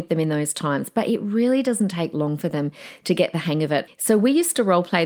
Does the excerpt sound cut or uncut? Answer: cut